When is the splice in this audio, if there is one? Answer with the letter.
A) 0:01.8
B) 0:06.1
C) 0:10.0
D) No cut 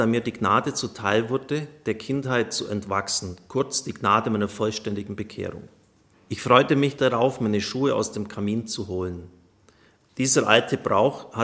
B